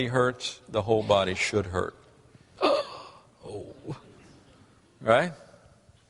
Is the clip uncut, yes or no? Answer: no